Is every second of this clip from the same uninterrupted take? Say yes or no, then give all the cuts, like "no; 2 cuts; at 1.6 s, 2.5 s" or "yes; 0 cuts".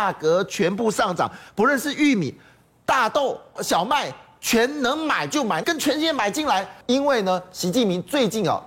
no; 3 cuts; at 3.6 s, 5.6 s, 6.8 s